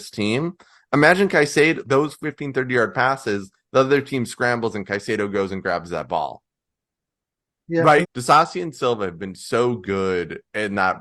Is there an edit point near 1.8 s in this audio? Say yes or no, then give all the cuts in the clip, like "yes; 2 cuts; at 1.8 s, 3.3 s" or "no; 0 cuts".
yes; 2 cuts; at 1.8 s, 8.0 s